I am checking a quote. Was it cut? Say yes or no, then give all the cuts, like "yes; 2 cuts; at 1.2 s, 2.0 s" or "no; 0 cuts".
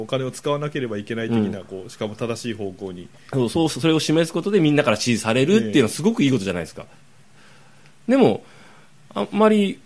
no; 0 cuts